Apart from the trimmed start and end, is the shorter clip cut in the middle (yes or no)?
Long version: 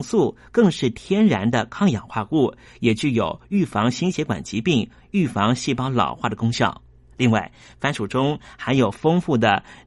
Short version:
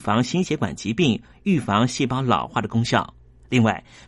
no